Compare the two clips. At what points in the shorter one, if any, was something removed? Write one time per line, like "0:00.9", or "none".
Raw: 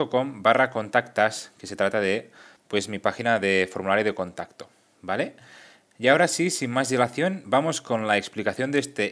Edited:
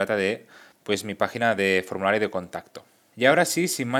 0:03.1